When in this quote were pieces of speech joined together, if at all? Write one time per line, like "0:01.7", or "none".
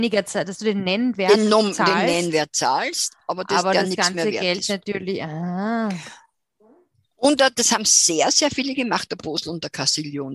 none